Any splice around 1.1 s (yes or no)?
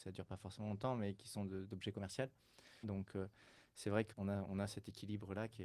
no